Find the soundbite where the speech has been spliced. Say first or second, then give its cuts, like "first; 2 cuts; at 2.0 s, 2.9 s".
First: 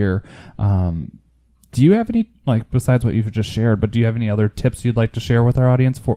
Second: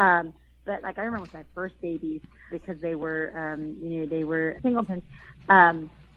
second; 2 cuts; at 2.5 s, 4.6 s